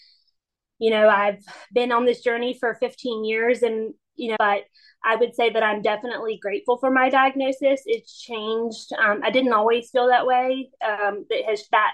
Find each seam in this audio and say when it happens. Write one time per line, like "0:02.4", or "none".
0:04.4